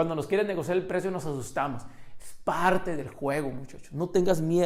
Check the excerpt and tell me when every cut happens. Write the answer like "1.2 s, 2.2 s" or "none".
none